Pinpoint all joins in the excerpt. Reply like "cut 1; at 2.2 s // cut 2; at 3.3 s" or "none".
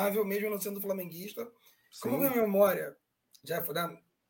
none